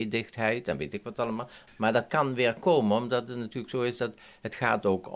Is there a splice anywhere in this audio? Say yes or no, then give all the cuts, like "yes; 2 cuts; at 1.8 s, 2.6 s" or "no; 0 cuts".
yes; 1 cut; at 1.7 s